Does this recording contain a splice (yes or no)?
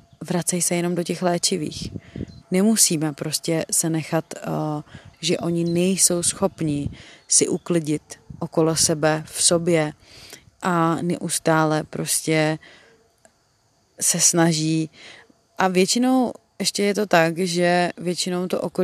yes